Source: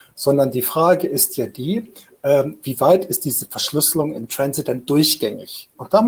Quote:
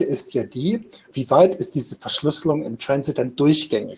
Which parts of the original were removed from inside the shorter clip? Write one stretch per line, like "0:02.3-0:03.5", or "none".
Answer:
0:02.1-0:02.6